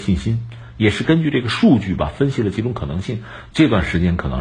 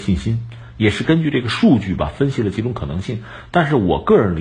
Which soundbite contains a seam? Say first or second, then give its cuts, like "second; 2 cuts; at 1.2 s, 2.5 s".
first; 1 cut; at 3.5 s